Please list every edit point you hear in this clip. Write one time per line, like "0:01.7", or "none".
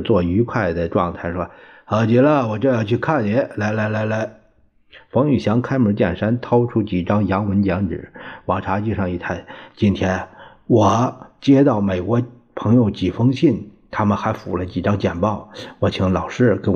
none